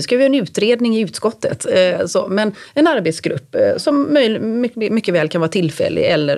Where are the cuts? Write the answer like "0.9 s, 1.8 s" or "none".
none